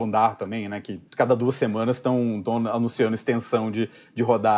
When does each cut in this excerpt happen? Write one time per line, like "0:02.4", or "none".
0:01.1